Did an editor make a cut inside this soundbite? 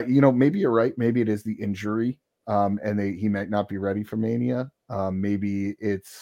no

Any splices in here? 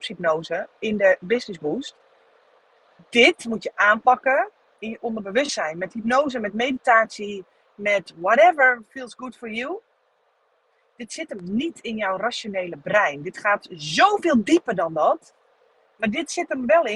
no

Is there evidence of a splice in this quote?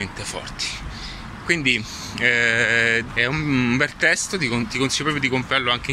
yes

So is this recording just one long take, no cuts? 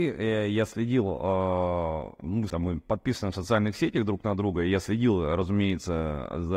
no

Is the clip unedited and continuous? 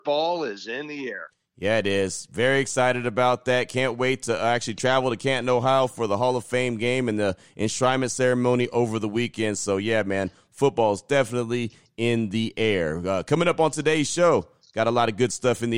yes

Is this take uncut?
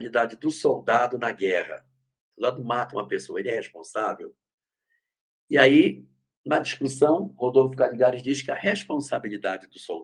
yes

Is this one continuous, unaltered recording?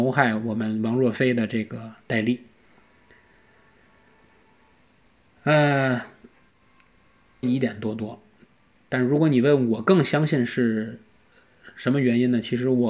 no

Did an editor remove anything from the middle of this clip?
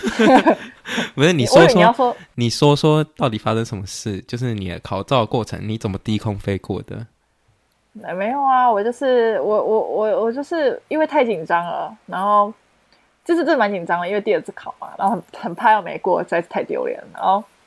no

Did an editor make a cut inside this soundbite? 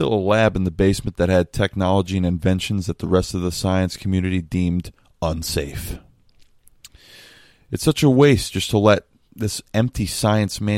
no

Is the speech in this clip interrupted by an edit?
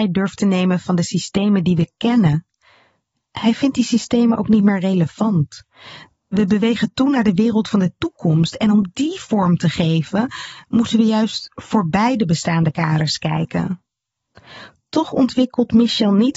no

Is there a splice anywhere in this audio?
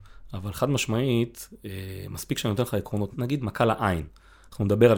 yes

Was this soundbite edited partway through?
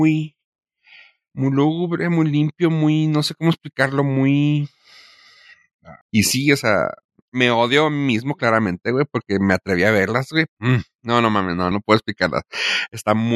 yes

